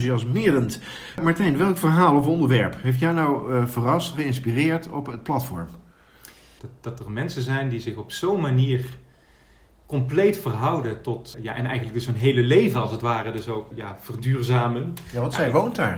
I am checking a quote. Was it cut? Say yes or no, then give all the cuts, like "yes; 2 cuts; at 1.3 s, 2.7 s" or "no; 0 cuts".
yes; 3 cuts; at 6.6 s, 11.3 s, 13.7 s